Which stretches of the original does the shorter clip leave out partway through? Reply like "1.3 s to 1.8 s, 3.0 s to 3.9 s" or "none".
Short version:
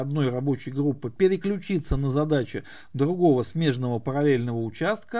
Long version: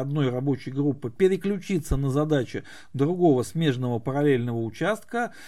none